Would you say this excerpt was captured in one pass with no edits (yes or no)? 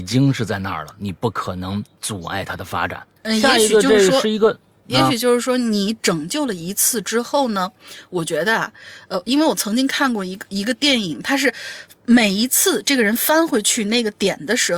no